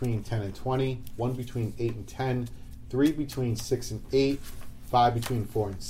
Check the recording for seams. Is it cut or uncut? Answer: uncut